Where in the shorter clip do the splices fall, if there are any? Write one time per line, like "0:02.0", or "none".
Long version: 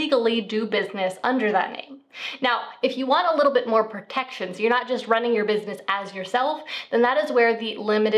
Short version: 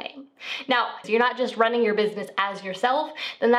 0:01.0